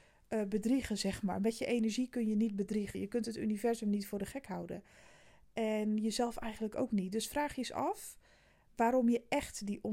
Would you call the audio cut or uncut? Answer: uncut